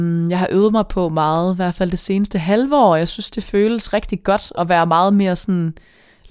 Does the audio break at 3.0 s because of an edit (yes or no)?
no